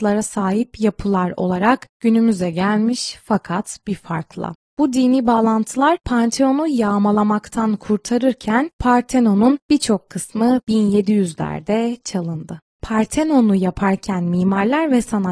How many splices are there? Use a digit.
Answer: 0